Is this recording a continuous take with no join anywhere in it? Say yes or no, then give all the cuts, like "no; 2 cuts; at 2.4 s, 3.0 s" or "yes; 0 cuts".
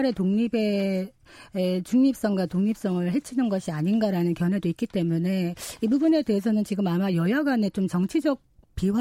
yes; 0 cuts